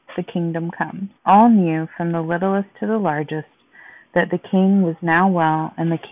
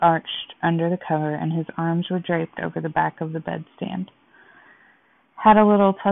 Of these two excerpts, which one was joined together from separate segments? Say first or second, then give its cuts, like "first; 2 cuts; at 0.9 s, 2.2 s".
first; 1 cut; at 1.2 s